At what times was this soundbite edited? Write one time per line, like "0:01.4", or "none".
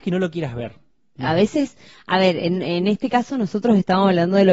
0:01.2